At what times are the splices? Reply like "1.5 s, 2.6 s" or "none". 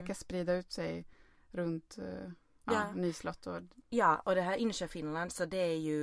none